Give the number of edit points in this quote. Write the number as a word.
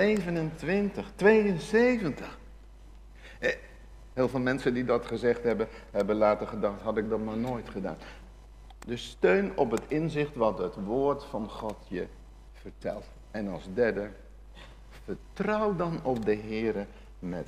one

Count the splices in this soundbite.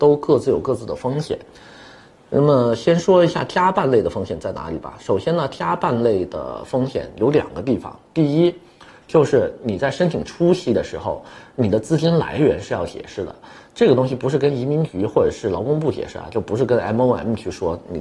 zero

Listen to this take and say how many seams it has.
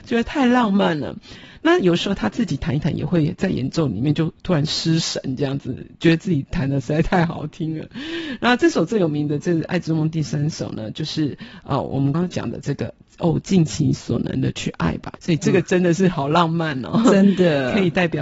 two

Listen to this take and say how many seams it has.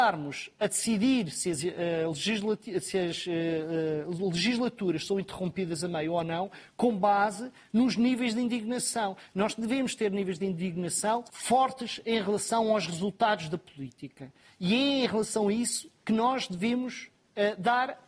one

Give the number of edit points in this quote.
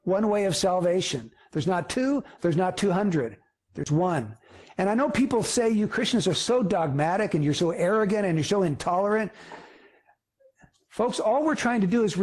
one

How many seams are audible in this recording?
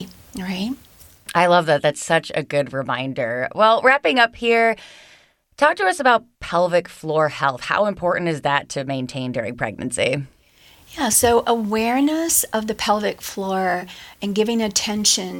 zero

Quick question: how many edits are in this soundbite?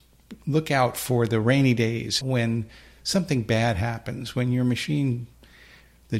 one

